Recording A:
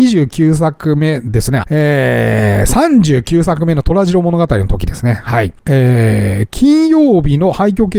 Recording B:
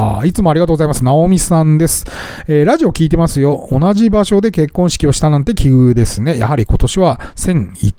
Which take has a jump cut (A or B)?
A